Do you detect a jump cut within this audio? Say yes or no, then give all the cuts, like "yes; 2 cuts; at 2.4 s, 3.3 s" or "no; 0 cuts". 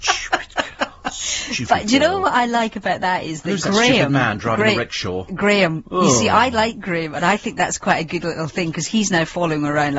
no; 0 cuts